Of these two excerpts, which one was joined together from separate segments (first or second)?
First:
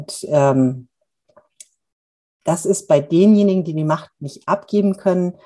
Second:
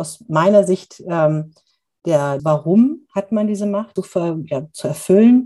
second